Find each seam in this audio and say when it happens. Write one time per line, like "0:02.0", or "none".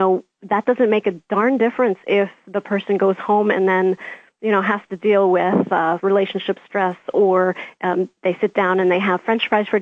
0:06.0